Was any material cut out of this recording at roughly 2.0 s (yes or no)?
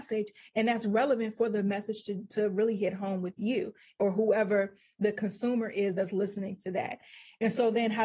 no